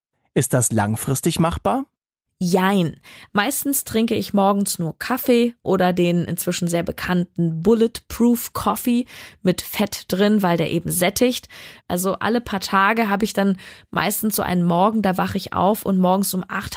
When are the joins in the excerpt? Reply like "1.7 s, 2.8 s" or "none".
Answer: 3.3 s, 11.8 s